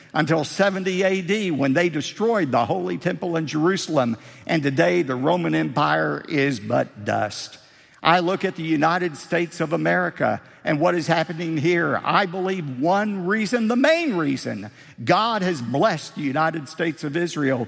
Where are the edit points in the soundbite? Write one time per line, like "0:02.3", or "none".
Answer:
none